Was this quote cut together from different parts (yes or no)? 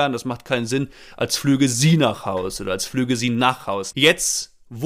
yes